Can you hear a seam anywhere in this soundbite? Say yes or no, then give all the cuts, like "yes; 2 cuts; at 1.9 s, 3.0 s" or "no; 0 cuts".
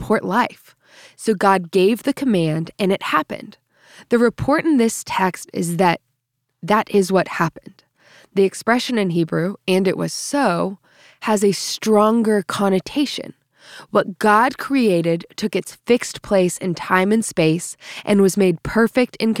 no; 0 cuts